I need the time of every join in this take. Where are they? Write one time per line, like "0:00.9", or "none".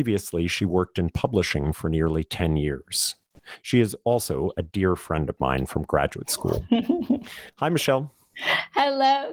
none